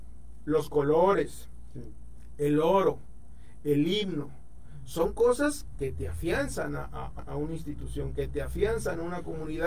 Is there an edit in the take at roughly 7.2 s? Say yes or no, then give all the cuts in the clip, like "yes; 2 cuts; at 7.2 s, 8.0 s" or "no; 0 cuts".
yes; 2 cuts; at 5.7 s, 7.2 s